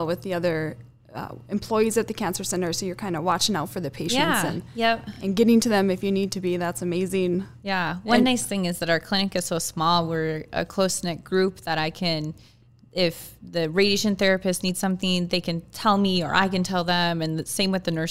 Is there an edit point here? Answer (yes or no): no